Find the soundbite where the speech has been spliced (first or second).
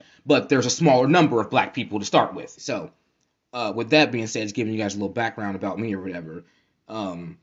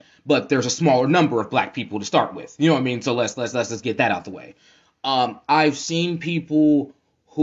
first